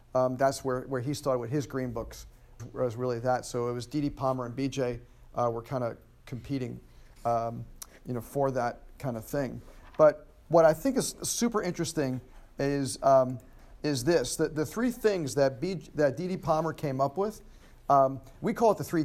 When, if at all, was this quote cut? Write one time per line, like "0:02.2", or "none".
0:02.6

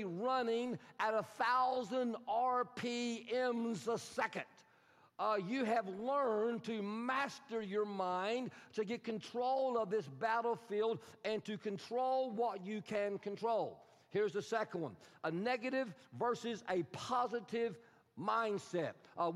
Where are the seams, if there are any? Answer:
none

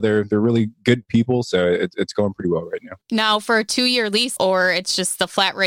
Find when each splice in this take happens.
0:03.0
0:04.4

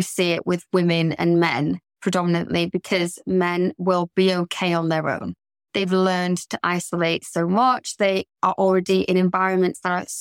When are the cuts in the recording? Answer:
none

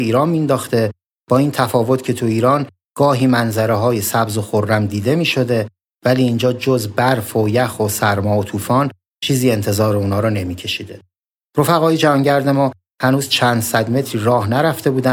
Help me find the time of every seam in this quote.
0:11.5

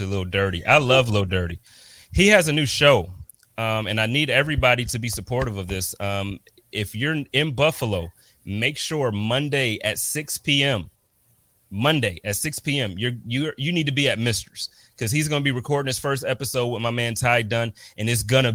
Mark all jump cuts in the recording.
none

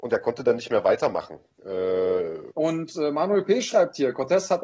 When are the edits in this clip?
0:02.5

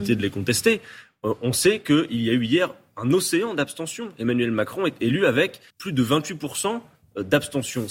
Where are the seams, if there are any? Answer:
0:05.7

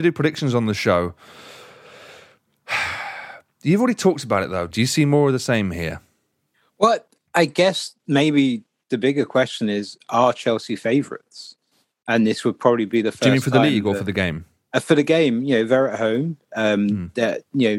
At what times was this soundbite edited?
0:04.7

